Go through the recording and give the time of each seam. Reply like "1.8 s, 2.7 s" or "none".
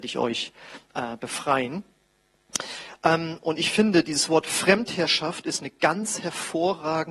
none